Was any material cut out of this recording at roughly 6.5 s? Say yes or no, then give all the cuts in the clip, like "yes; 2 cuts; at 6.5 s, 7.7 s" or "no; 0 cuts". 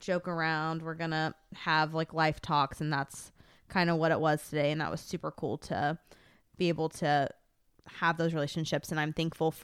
no; 1 cut; at 7.8 s